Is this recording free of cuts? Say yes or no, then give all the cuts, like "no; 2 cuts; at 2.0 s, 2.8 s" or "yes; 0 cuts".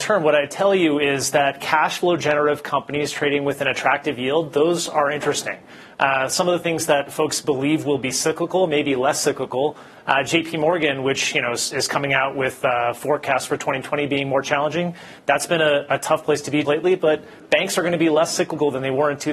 no; 1 cut; at 16.6 s